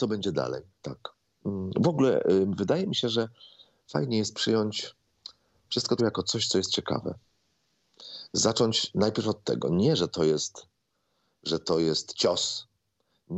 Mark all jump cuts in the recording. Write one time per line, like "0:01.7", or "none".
0:06.0